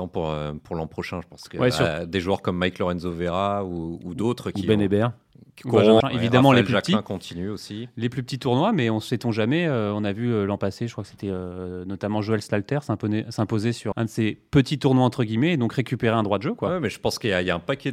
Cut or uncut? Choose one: cut